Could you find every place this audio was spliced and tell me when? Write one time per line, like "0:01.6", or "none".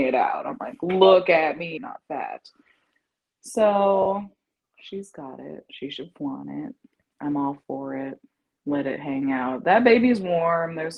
0:01.8